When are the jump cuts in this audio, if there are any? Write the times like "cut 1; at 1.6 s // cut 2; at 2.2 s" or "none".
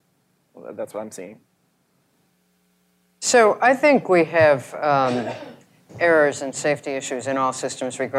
none